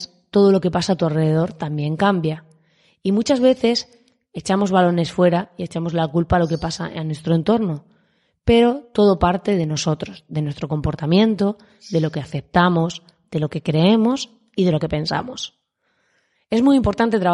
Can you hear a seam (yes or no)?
no